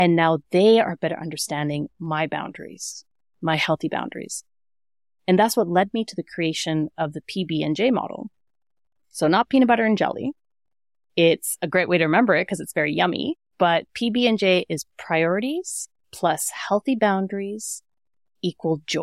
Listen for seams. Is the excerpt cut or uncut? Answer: cut